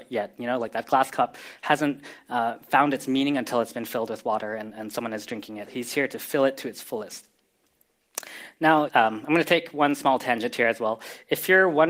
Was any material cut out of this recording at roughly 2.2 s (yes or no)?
no